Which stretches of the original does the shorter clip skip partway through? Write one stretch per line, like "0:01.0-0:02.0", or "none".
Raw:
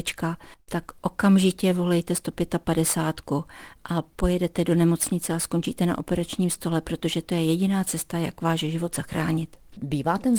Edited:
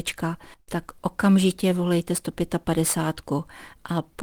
none